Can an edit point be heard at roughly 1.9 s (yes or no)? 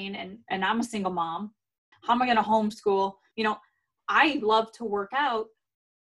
yes